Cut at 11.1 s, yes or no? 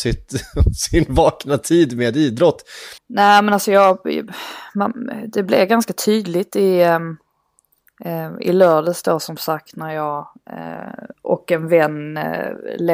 yes